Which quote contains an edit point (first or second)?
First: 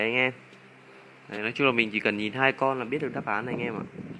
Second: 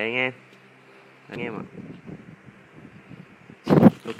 second